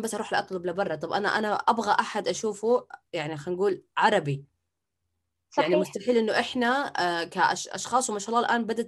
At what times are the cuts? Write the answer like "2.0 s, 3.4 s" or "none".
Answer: none

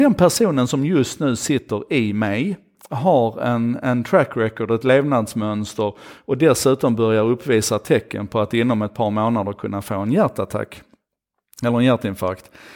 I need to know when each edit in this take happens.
none

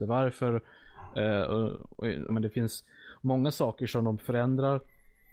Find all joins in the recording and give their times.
2.3 s

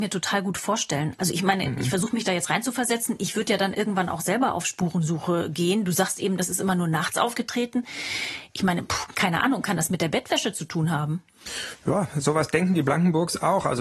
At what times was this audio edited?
none

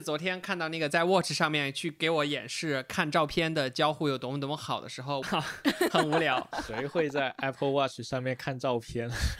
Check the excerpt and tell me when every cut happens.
5.2 s

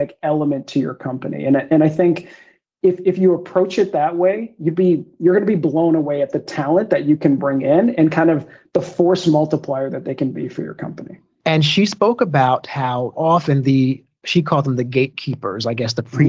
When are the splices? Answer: 11.4 s, 13.1 s

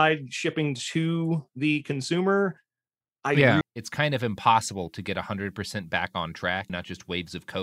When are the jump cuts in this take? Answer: 3.6 s, 6.7 s

